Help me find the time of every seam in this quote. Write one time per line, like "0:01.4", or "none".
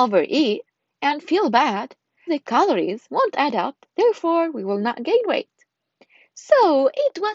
0:02.3